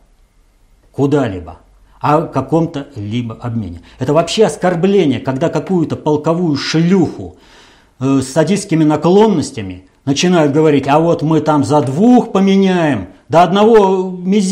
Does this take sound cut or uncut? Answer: uncut